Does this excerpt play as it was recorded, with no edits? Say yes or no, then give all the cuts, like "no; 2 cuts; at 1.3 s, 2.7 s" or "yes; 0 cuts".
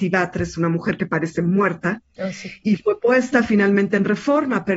yes; 0 cuts